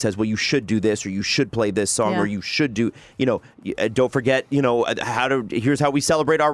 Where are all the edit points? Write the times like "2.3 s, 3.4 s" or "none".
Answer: none

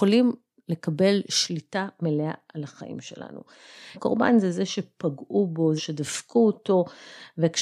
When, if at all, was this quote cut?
3.9 s, 5.8 s

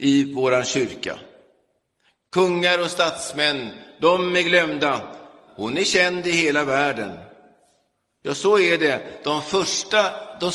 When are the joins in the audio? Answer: 5.5 s

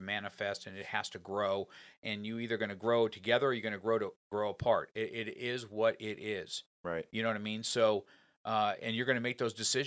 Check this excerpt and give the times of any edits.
none

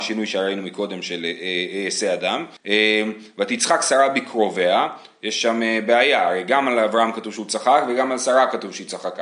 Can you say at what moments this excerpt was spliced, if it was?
2.6 s

